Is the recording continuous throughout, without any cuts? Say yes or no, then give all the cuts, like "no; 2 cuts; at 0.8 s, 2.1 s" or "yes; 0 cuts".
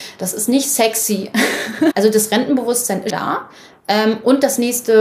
no; 2 cuts; at 1.9 s, 3.1 s